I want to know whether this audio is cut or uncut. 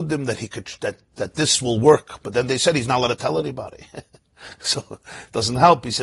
cut